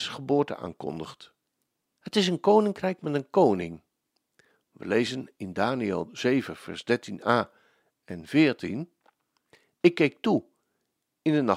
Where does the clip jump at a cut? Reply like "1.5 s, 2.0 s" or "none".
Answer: 1.9 s